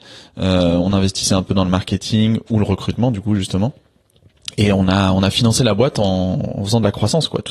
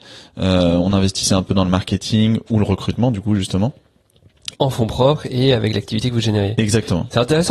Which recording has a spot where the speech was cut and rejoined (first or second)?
second